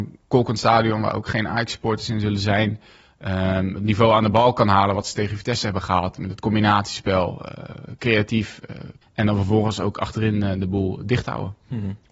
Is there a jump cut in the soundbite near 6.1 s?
no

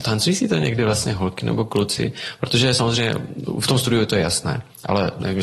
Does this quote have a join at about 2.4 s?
no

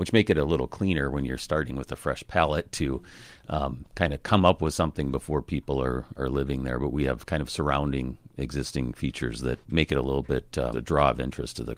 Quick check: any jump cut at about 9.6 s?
yes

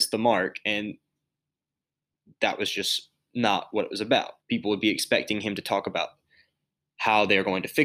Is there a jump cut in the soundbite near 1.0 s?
no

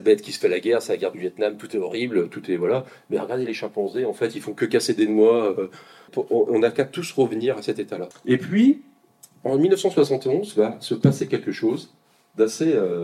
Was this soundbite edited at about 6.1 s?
yes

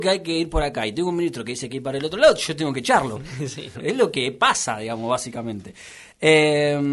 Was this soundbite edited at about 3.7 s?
yes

